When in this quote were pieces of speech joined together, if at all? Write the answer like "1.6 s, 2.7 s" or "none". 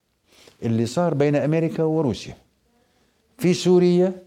none